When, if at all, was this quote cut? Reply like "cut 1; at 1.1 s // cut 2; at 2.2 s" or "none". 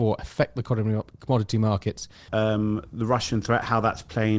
cut 1; at 2.3 s